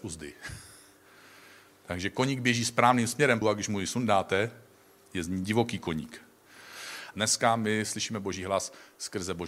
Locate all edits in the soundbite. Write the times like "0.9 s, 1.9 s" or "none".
3.4 s, 7.1 s